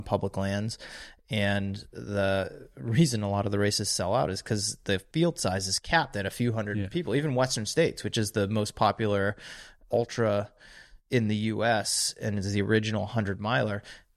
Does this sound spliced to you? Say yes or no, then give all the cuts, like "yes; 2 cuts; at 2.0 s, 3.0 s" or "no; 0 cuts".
no; 0 cuts